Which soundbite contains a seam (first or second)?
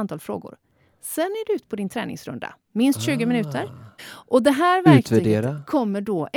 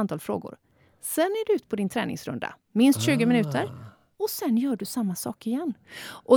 first